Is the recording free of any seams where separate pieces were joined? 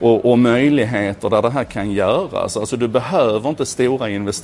yes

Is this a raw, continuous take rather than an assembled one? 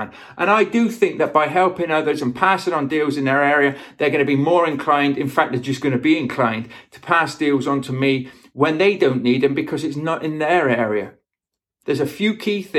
no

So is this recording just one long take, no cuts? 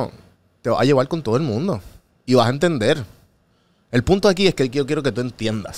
yes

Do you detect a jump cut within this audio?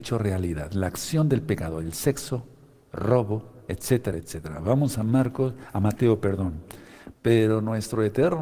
yes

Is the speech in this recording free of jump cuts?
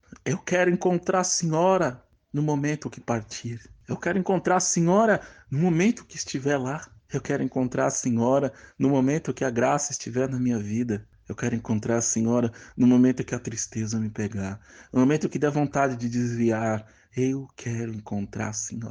yes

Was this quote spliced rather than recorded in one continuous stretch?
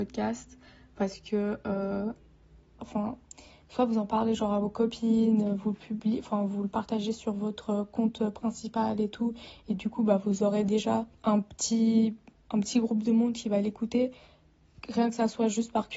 yes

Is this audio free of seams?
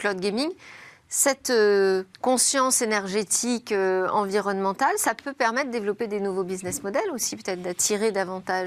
no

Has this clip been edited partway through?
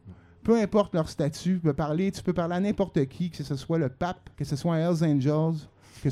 yes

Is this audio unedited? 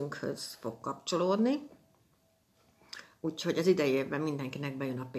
yes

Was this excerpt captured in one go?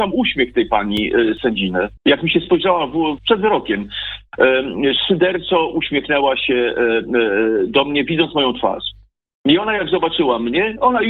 no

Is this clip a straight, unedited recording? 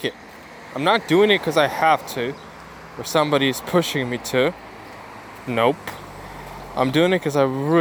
yes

